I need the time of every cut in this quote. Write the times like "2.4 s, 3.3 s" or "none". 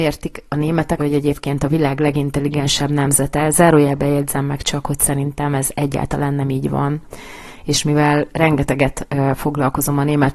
1.0 s